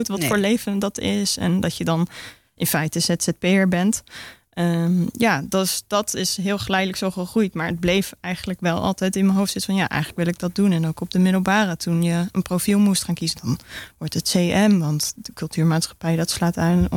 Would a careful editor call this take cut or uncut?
cut